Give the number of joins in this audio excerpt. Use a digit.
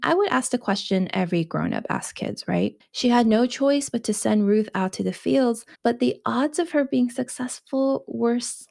2